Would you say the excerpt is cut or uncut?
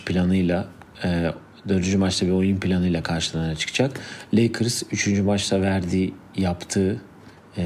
uncut